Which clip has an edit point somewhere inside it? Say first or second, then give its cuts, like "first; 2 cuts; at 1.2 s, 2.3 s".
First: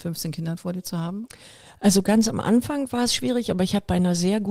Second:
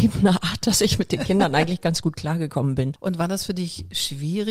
second; 1 cut; at 3.0 s